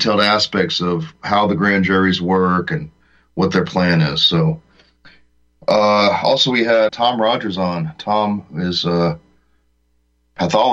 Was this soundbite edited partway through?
yes; 1 cut; at 6.9 s

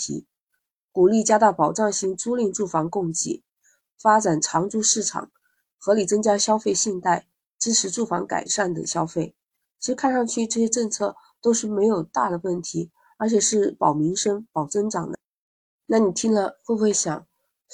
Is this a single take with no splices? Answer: yes; 0 cuts

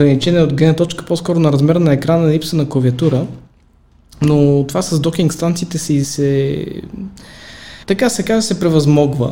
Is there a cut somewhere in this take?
yes; 2 cuts; at 6.0 s, 7.8 s

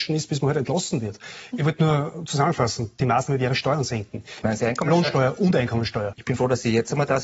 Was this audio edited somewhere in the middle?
yes; 3 cuts; at 1.5 s, 4.4 s, 6.1 s

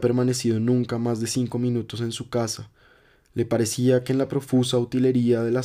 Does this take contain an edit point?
no; 0 cuts

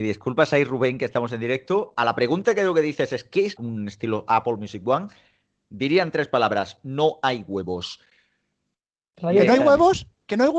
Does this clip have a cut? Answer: yes; 1 cut; at 3.6 s

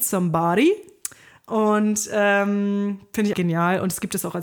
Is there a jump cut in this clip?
yes; 1 cut; at 3.3 s

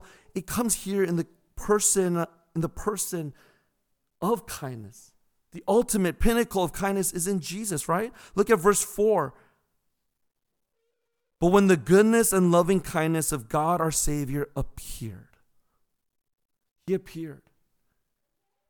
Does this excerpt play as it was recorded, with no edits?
yes; 0 cuts

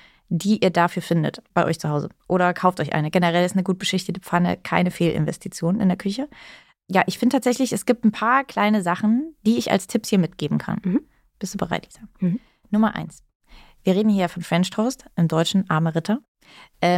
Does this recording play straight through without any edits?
yes; 0 cuts

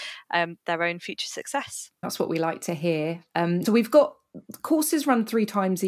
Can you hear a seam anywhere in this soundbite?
yes; 2 cuts; at 2.0 s, 3.7 s

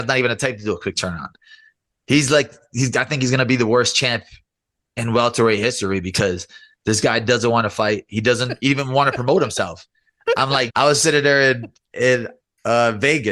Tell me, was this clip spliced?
yes; 1 cut; at 10.7 s

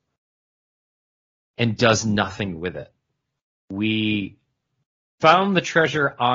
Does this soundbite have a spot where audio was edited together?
yes; 1 cut; at 3.6 s

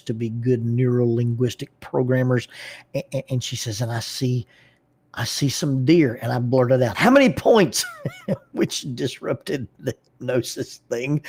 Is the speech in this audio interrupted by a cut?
no; 0 cuts

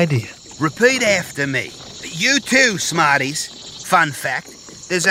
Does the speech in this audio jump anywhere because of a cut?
yes; 1 cut; at 3.8 s

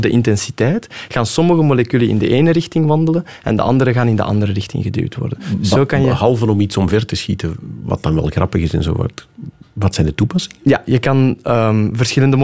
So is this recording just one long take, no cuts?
yes; 0 cuts

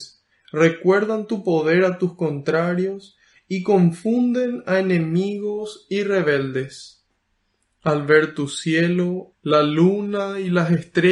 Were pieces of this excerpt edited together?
yes; 1 cut; at 9.3 s

